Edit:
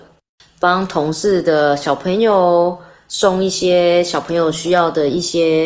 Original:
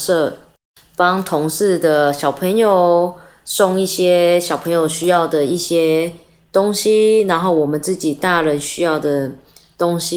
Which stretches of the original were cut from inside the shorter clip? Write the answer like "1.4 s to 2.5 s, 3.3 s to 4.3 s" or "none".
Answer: none